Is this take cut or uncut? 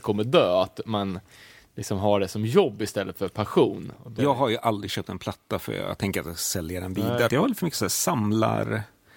cut